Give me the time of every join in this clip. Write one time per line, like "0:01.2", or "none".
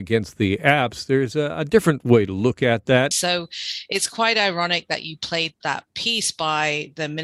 0:03.1
0:05.5